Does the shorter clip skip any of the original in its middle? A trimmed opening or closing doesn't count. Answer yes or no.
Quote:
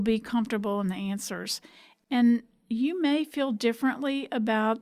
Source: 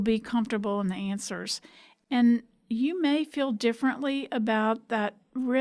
no